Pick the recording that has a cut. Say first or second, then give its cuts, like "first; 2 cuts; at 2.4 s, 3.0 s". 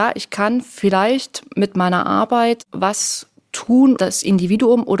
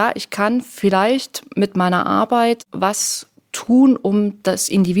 first; 1 cut; at 4.0 s